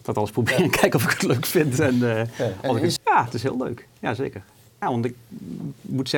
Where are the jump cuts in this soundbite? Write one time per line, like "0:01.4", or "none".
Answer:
0:03.0
0:04.8